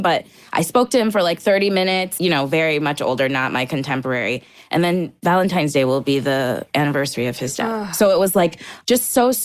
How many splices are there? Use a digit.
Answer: 1